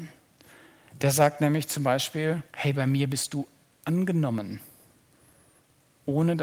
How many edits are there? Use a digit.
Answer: 1